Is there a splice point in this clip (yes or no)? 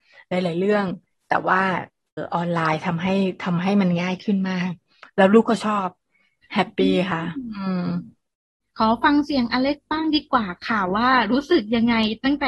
yes